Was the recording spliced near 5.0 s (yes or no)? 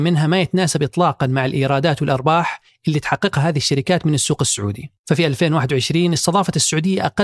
yes